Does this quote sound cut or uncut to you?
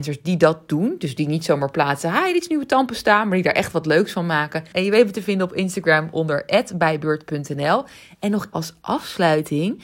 cut